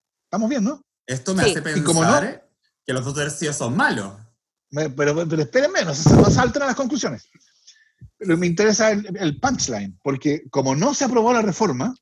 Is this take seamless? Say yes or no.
yes